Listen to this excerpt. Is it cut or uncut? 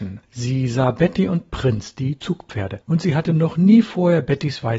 uncut